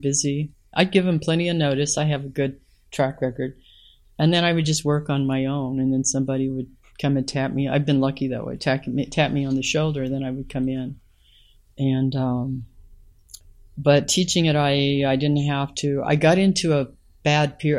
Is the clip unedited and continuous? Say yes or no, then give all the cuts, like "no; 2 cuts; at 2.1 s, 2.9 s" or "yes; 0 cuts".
yes; 0 cuts